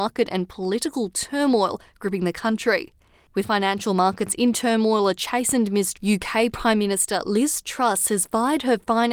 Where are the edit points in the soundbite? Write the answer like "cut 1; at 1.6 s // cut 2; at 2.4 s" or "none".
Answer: cut 1; at 5.9 s

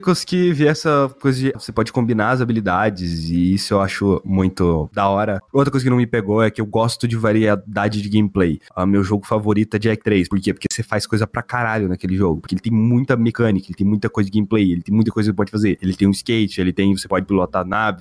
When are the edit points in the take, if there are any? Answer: cut 1; at 1.5 s

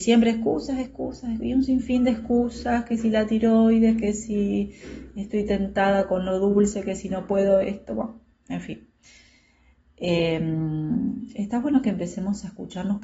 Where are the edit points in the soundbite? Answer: none

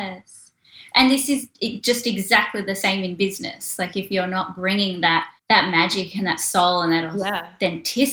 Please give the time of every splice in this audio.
cut 1; at 5.4 s

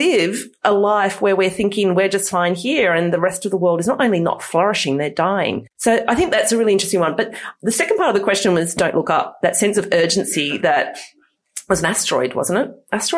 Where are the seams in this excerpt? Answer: none

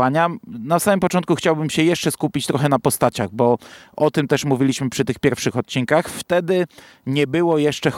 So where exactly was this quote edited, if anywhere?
none

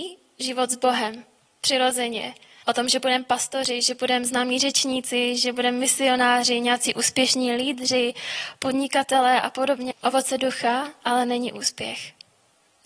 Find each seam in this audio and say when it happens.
cut 1; at 2.6 s // cut 2; at 9.9 s

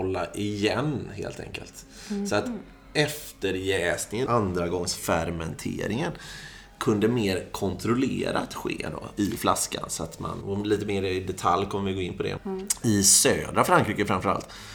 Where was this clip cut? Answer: cut 1; at 4.3 s // cut 2; at 10.4 s // cut 3; at 12.4 s

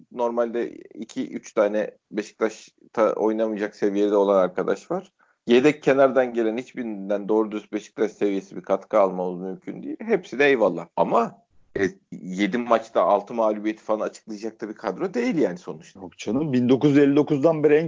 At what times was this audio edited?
cut 1; at 10.9 s

